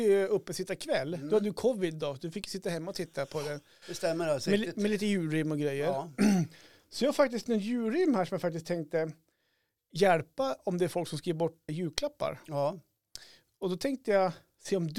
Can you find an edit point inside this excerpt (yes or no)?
yes